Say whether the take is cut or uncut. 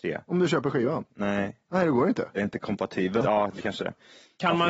cut